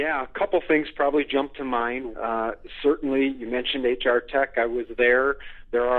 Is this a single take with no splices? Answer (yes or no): no